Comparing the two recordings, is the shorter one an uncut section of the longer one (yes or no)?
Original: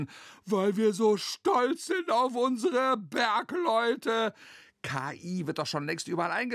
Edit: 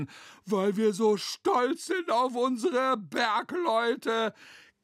yes